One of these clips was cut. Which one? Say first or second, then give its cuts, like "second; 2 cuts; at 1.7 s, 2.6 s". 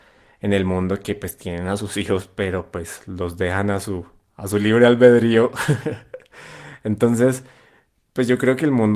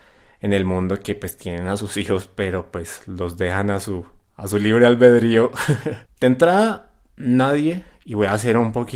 second; 1 cut; at 6.1 s